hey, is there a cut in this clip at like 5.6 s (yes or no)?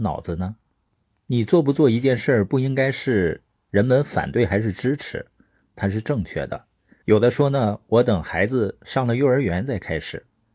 yes